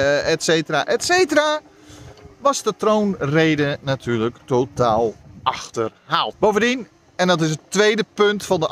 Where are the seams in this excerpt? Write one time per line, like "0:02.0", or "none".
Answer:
0:06.3